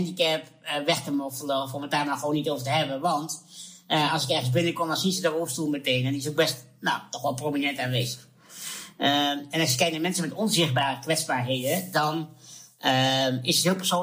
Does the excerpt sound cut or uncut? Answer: uncut